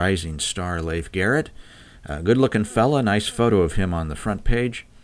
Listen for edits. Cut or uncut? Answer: uncut